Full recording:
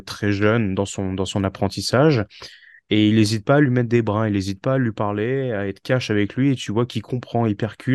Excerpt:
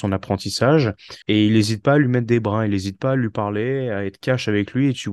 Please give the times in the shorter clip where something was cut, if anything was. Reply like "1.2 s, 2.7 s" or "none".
1.2 s